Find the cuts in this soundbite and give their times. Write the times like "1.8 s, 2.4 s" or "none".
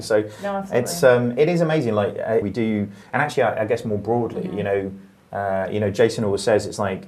2.4 s